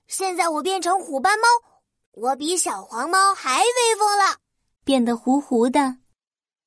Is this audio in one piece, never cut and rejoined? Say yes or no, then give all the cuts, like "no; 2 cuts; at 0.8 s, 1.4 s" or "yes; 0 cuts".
no; 1 cut; at 4.8 s